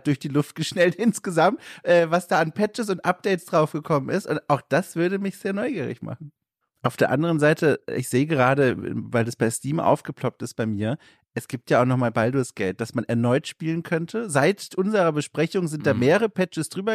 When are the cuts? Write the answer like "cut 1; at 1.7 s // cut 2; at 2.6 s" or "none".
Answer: cut 1; at 6.6 s